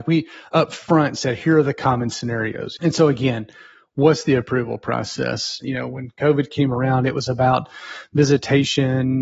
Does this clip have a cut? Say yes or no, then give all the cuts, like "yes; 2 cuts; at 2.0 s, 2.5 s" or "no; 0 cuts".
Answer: yes; 2 cuts; at 2.8 s, 5.6 s